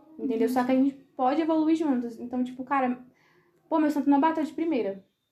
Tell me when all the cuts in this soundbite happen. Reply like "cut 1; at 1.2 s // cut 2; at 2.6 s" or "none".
none